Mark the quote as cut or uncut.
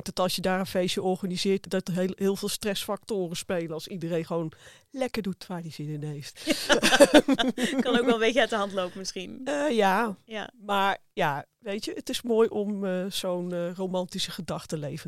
cut